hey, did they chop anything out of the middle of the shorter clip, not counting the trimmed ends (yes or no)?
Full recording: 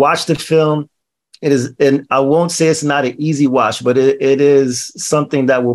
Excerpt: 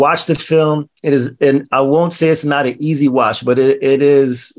yes